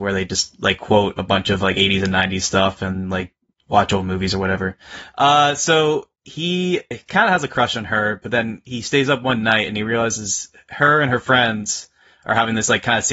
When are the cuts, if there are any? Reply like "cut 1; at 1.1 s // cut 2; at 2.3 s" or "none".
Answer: cut 1; at 6.9 s